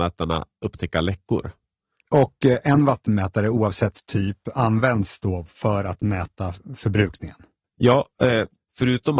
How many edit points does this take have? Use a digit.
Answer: 1